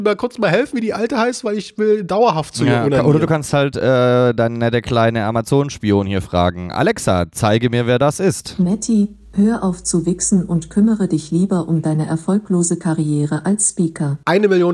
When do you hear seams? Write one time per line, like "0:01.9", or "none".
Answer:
none

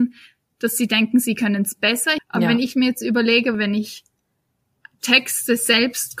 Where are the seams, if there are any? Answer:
0:02.2
0:03.5

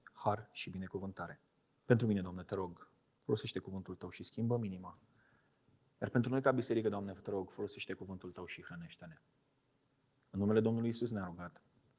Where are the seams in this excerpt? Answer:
0:01.8

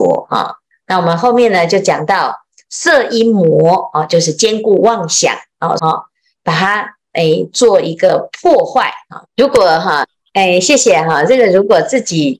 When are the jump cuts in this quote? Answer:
0:05.8
0:09.2

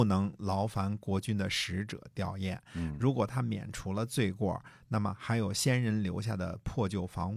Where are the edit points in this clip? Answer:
none

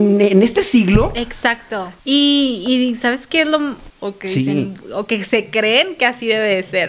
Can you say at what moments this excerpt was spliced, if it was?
0:02.0
0:03.9

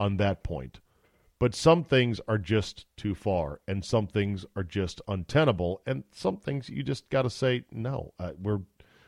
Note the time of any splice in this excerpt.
none

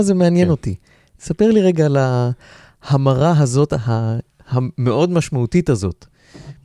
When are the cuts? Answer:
none

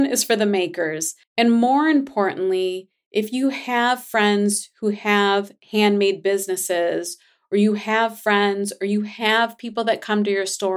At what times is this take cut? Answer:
0:01.2

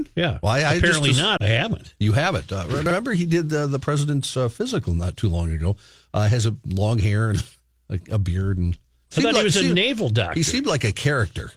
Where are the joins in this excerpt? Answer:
0:01.4

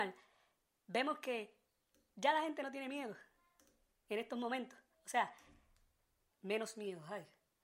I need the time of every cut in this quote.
0:06.3

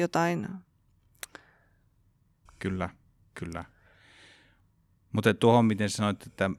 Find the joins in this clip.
0:02.5

